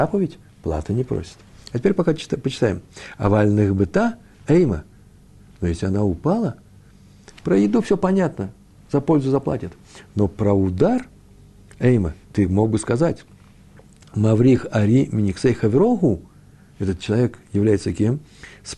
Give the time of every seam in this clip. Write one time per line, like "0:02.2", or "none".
none